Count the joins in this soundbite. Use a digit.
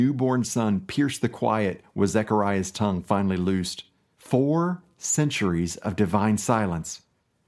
1